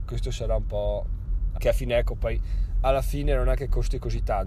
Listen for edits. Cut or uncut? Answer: cut